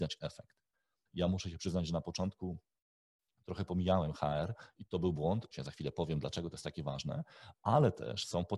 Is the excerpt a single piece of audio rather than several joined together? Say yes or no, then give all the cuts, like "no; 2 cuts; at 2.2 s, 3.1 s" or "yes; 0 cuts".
no; 2 cuts; at 1.1 s, 5.5 s